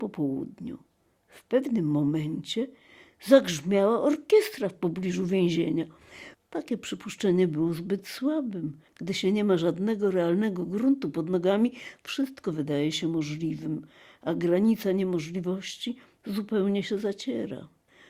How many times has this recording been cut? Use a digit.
2